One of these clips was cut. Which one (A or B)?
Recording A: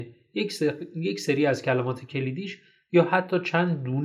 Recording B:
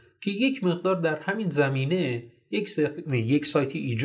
B